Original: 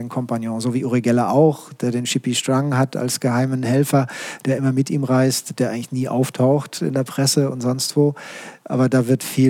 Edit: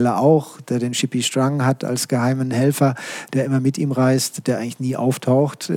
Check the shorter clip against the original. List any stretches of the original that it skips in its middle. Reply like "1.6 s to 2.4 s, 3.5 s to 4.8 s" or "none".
none